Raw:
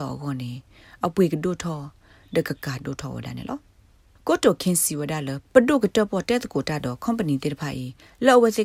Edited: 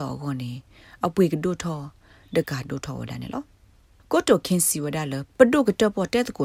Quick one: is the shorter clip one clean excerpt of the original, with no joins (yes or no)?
no